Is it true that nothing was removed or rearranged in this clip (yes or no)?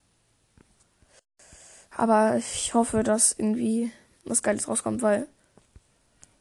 yes